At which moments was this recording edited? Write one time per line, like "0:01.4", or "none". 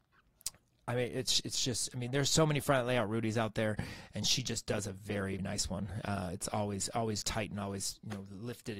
0:05.4
0:07.2